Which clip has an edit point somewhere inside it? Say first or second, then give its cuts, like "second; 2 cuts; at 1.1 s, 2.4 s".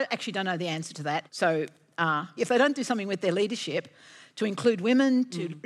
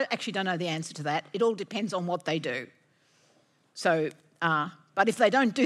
first; 2 cuts; at 1.3 s, 2.4 s